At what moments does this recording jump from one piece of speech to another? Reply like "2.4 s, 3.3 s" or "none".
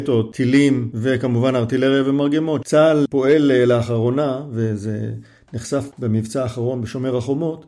3.1 s